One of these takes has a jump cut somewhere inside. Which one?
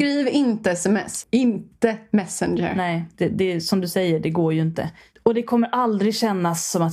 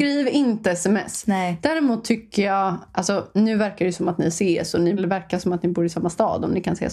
first; 2 cuts; at 1.2 s, 3.1 s

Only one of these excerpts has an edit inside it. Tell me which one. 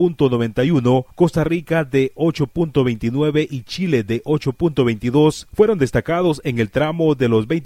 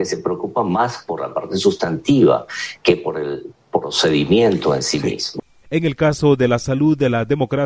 second; 1 cut; at 5.6 s

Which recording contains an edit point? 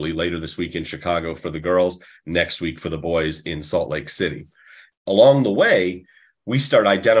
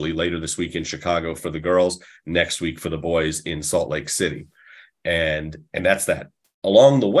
first; 1 cut; at 4.9 s

